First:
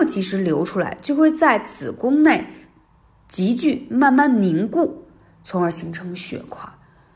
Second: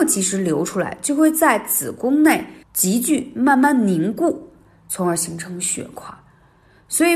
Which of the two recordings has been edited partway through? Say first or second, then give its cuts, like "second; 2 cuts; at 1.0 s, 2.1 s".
second; 1 cut; at 2.6 s